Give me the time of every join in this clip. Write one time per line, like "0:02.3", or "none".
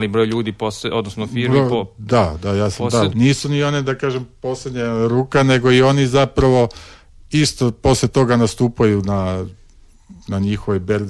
0:03.1